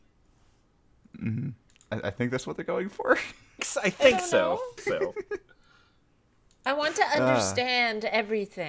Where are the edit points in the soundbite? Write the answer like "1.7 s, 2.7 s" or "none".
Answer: 3.6 s, 4.8 s